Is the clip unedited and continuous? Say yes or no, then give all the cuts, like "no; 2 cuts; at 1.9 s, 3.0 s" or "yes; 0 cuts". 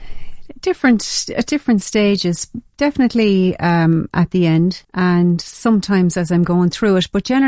no; 1 cut; at 4.8 s